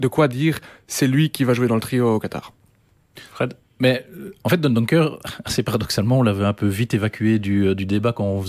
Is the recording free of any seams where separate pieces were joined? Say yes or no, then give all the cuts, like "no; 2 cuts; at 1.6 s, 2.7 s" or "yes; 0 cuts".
yes; 0 cuts